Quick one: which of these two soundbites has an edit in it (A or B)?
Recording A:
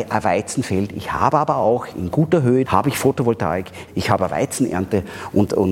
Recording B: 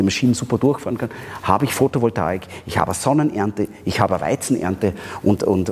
A